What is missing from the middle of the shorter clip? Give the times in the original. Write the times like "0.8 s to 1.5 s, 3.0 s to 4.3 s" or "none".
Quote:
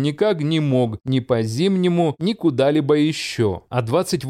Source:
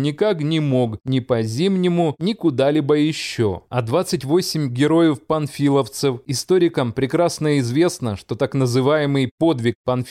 none